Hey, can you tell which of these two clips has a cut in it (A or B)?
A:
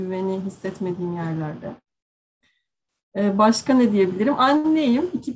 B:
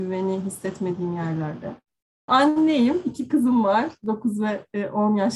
B